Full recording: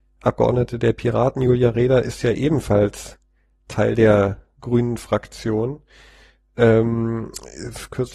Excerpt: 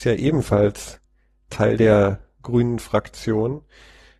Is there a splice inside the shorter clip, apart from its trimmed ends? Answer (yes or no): no